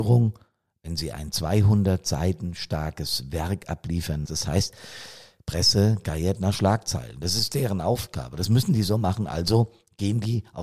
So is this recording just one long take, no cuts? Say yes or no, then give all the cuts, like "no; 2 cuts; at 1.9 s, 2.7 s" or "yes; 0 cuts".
no; 1 cut; at 4.3 s